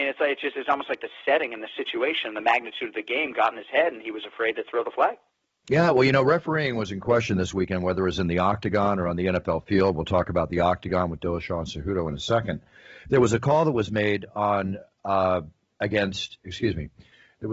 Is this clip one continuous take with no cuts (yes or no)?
no